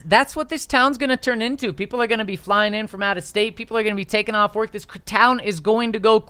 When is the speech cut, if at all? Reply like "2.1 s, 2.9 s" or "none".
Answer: none